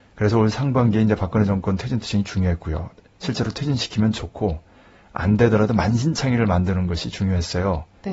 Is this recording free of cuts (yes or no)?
yes